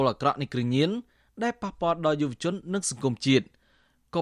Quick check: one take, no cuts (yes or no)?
yes